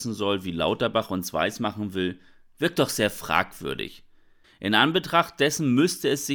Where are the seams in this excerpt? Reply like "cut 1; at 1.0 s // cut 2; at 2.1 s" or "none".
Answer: cut 1; at 4.4 s